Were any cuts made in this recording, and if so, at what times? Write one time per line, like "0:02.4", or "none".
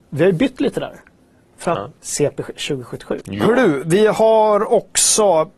0:02.0
0:03.2